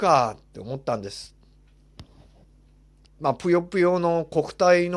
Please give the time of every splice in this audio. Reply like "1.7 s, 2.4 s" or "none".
3.0 s